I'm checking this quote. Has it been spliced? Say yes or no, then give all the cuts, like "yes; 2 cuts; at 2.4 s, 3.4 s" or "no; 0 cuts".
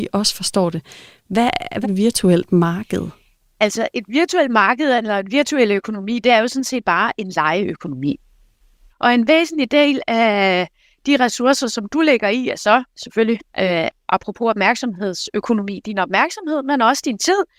yes; 2 cuts; at 1.8 s, 8.9 s